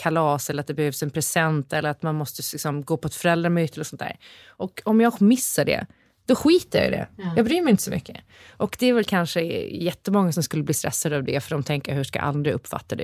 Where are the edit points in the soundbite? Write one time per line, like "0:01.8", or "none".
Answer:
none